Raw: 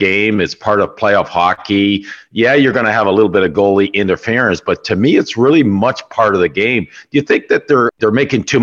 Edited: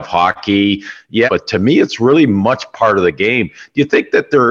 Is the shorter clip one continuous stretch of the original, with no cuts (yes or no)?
no